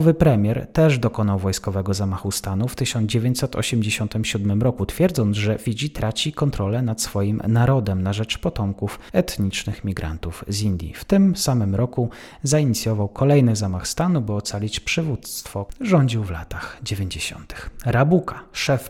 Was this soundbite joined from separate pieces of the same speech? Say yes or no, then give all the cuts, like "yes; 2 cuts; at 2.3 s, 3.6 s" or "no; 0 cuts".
no; 0 cuts